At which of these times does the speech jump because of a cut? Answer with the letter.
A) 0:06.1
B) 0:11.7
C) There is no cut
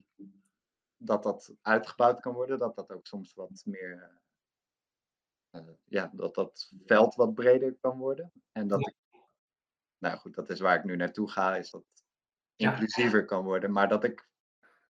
B